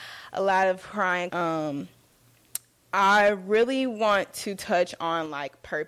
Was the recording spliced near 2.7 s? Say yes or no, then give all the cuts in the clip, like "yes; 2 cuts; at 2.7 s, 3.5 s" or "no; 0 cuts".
no; 1 cut; at 1.3 s